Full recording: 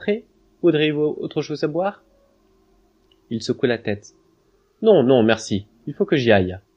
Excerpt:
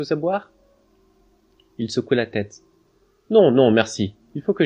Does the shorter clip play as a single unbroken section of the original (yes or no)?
yes